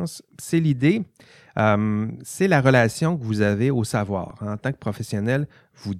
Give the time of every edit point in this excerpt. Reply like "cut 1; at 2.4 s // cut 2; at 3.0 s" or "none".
none